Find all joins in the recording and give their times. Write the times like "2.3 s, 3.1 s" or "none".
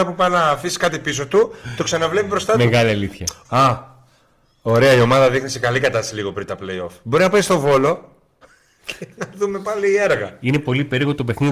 3.4 s